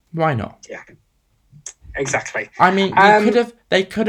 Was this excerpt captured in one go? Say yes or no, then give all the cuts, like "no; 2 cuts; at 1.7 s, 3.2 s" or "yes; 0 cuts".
yes; 0 cuts